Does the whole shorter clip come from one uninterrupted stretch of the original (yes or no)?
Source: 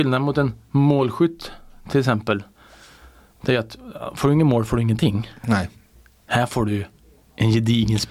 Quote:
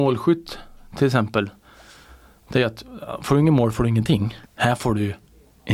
no